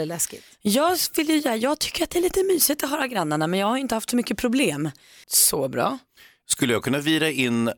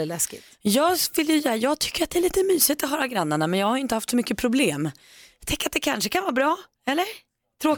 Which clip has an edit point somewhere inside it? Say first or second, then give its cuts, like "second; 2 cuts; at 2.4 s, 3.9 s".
first; 1 cut; at 5.2 s